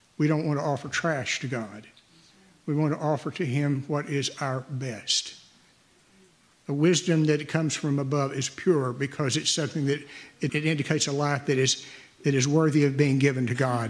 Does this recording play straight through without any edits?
no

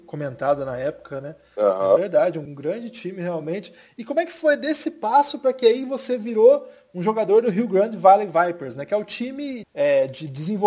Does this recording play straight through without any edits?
no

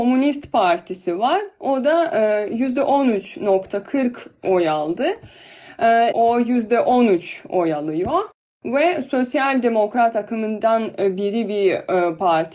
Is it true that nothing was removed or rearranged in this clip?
no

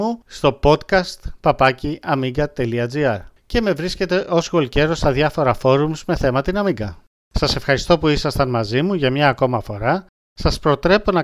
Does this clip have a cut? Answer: yes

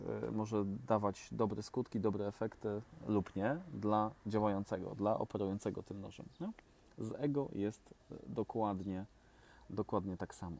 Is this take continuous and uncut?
yes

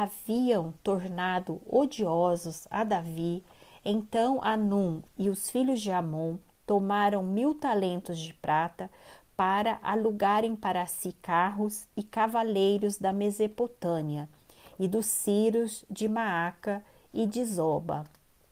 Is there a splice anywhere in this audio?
no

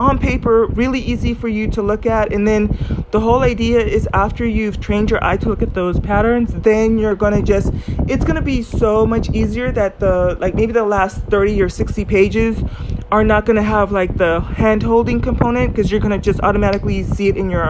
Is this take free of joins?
yes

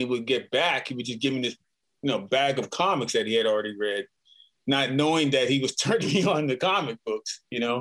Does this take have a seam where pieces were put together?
no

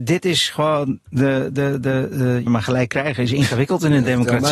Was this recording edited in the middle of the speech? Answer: yes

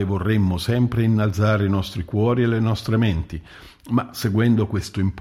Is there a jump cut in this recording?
no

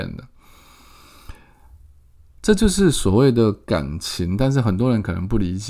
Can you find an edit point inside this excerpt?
no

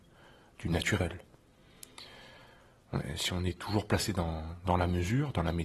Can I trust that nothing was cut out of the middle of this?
yes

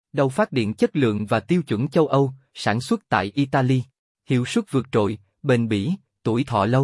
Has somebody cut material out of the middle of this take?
yes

